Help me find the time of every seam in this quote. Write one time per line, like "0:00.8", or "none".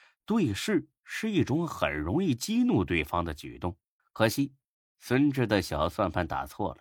0:04.0